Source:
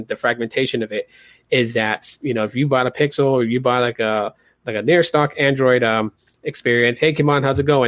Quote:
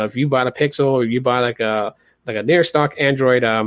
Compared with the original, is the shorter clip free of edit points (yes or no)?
yes